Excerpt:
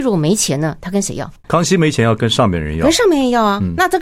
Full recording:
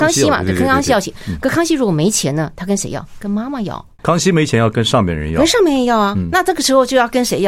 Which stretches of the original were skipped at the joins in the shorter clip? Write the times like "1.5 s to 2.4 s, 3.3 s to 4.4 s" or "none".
3.1 s to 3.9 s